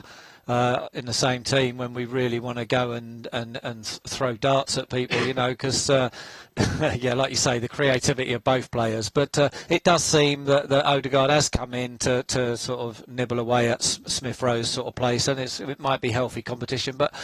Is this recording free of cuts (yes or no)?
yes